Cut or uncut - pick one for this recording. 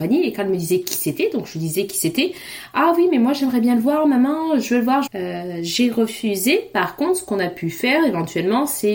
cut